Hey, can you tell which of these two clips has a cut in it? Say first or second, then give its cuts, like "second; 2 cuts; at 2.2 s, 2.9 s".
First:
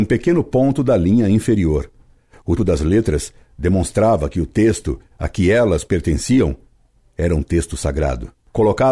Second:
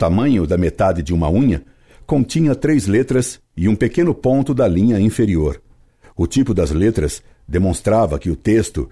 first; 1 cut; at 2.6 s